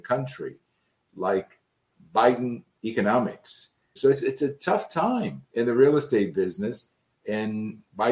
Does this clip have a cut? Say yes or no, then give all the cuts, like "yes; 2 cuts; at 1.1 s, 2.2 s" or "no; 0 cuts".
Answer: yes; 2 cuts; at 4.0 s, 5.4 s